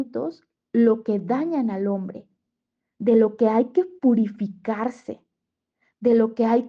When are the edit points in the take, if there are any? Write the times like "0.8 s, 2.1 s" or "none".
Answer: none